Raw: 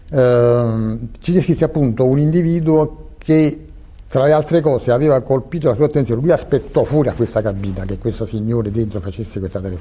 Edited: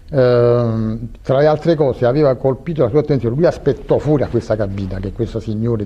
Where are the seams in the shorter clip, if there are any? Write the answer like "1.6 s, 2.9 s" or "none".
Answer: 1.2 s